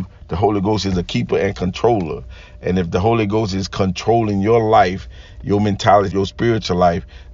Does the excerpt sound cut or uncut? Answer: cut